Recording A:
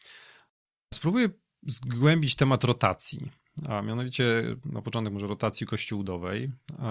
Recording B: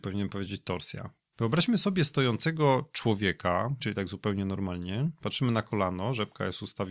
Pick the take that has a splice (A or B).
B